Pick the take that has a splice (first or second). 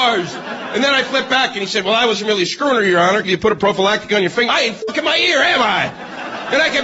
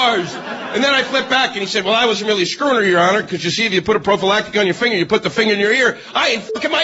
first